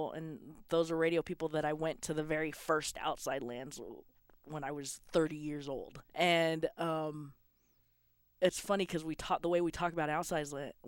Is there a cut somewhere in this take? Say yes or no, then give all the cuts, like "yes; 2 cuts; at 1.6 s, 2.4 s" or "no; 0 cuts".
yes; 1 cut; at 6.1 s